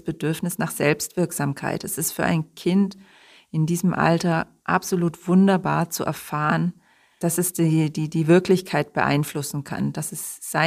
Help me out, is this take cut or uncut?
cut